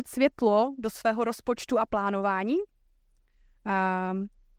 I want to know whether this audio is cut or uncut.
uncut